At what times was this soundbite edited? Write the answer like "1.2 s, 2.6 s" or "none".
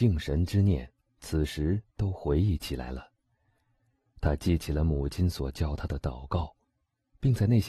none